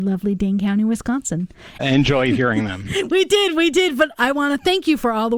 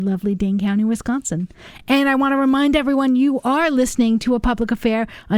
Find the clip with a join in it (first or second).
first